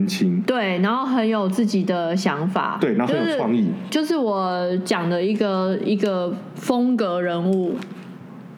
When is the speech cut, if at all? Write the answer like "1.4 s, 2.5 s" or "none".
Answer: none